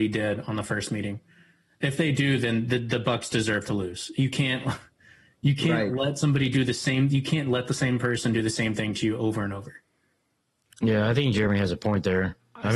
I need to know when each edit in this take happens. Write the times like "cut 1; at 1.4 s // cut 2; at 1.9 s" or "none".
none